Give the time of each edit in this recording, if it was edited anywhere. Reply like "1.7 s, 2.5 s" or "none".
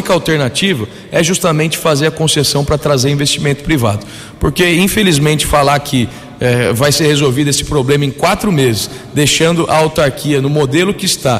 none